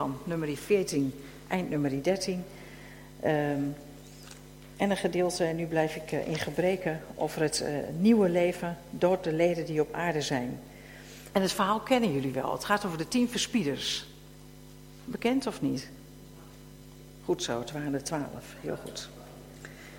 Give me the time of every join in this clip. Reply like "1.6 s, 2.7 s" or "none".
11.3 s